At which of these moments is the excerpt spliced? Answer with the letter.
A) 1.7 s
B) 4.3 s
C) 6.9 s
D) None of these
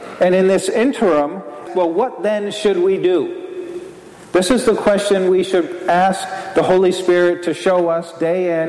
A